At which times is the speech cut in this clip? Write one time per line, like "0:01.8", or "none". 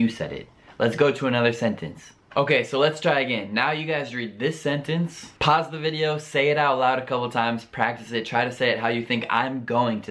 0:05.4